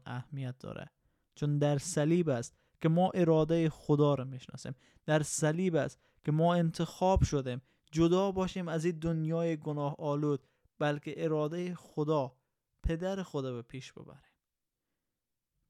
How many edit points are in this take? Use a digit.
0